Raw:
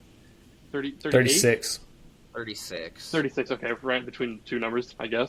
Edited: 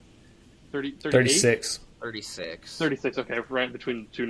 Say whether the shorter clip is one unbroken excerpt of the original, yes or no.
no